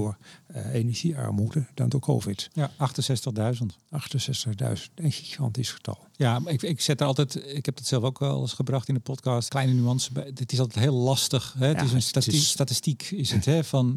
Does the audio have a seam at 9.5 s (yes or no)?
yes